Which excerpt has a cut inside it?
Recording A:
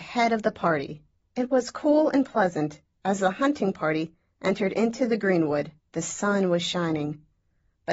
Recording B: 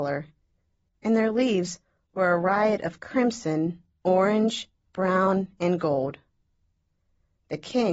A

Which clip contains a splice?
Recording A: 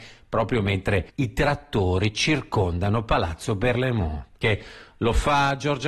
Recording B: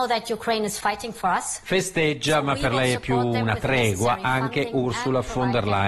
A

